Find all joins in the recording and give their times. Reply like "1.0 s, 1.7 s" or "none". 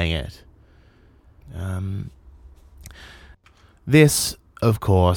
1.4 s